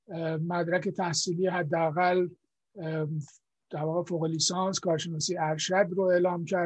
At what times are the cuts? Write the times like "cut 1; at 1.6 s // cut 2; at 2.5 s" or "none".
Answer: none

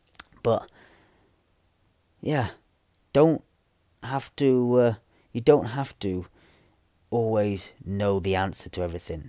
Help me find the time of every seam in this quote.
none

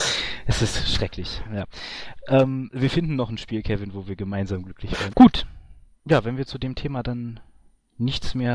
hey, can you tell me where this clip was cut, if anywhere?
cut 1; at 5.1 s

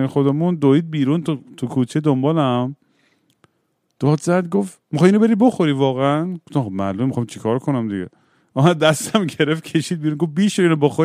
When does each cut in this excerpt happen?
none

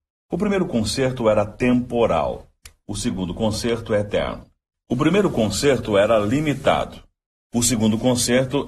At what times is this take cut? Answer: cut 1; at 4.7 s

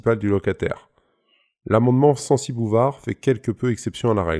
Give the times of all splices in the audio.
none

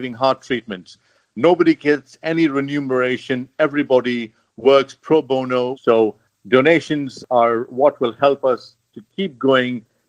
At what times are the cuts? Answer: cut 1; at 5.7 s

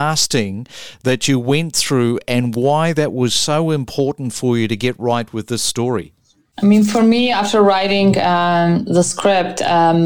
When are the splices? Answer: none

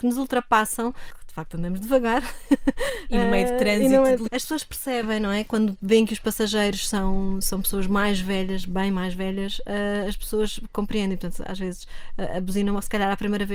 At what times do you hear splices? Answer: cut 1; at 4.3 s

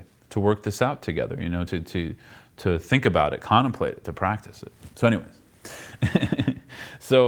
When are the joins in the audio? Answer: none

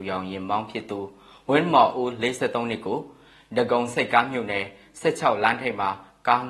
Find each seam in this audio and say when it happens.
none

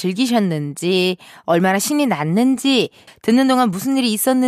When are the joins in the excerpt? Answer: cut 1; at 3.1 s

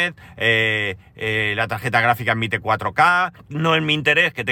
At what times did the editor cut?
cut 1; at 3.3 s

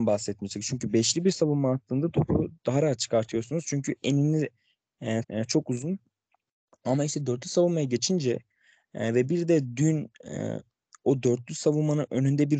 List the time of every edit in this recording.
cut 1; at 5.2 s

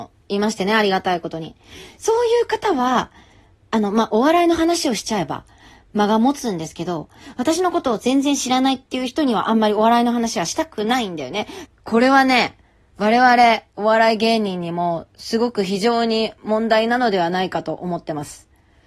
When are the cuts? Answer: cut 1; at 11.7 s

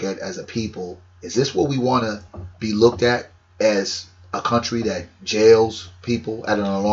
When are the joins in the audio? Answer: cut 1; at 2.5 s

